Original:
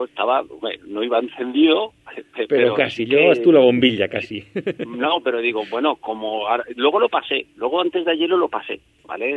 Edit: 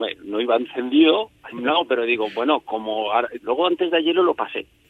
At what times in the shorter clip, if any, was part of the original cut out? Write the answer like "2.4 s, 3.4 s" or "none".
1.5 s, 3.4 s